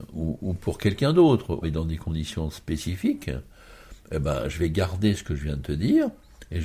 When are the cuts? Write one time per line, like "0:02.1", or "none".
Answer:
0:01.6